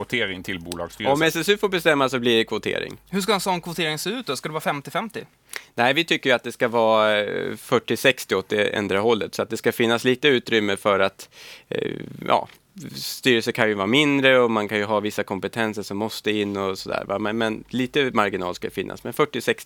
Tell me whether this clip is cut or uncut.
uncut